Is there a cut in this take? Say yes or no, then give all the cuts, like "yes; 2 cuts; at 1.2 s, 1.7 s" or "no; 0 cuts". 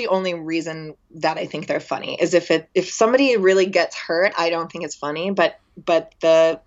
no; 0 cuts